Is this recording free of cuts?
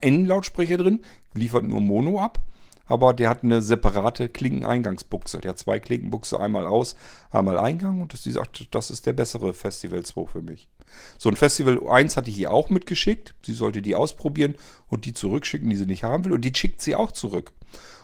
yes; 0 cuts

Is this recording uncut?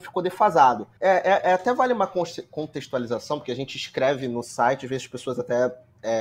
no; 1 cut; at 1.0 s

